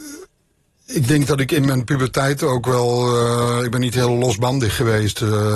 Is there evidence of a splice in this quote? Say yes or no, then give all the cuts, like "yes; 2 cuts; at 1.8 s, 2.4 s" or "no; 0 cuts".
no; 0 cuts